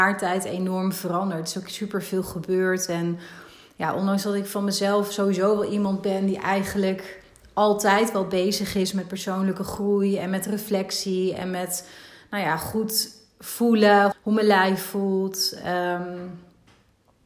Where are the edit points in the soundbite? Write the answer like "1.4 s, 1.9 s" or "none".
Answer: 14.1 s